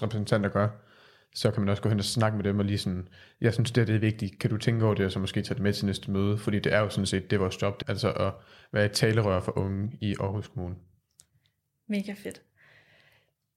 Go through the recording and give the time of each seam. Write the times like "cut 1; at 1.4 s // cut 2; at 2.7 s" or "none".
cut 1; at 7.8 s